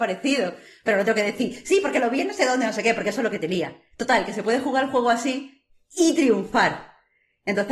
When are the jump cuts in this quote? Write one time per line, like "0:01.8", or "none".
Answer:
none